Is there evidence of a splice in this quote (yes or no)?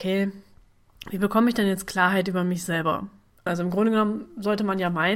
yes